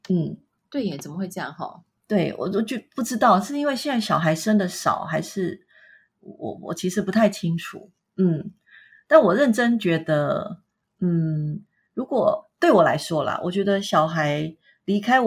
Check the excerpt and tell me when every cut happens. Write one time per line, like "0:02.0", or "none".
none